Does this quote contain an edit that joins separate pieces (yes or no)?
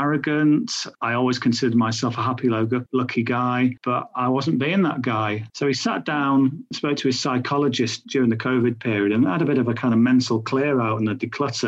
no